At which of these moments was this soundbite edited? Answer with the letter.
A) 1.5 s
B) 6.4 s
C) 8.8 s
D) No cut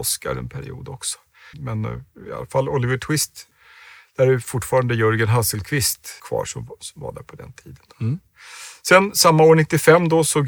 A